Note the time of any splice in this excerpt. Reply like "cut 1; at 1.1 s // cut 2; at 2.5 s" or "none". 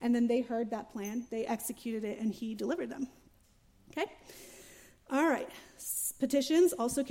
none